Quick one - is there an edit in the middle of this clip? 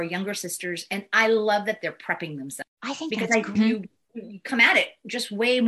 yes; 1 cut; at 3.6 s

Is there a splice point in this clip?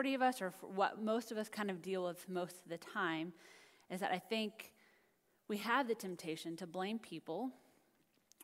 no; 0 cuts

